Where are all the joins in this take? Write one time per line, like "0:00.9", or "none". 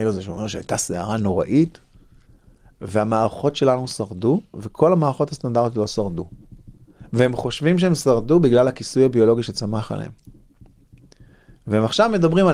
none